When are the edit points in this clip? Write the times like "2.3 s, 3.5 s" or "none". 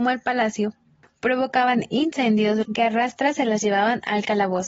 2.6 s